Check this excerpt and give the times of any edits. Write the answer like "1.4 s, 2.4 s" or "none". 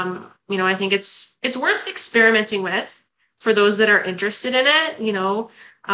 none